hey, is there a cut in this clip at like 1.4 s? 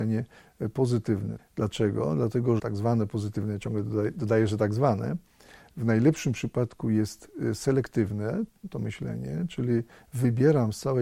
yes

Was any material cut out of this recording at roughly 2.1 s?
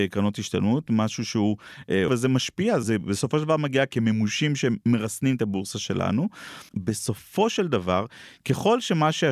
yes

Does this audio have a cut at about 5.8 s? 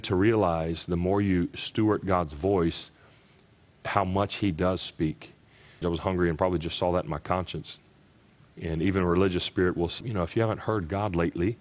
yes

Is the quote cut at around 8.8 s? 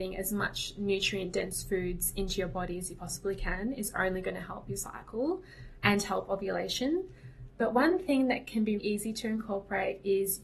yes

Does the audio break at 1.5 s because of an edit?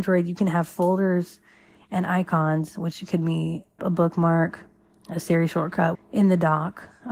no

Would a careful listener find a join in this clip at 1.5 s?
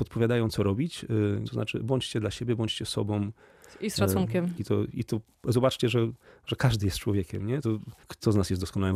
yes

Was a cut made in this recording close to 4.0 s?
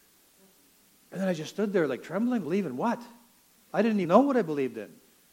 yes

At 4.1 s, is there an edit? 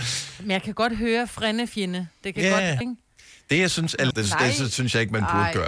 yes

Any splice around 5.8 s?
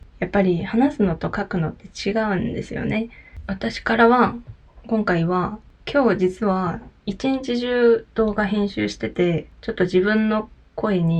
yes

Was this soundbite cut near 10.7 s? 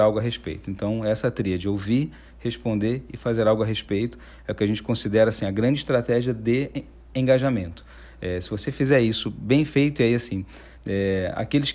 yes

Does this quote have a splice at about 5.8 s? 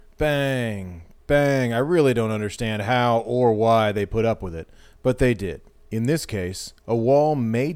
yes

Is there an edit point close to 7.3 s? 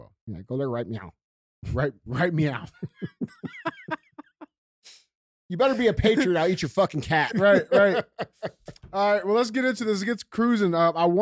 yes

